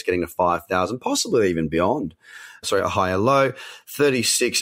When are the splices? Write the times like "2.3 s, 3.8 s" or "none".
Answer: 2.6 s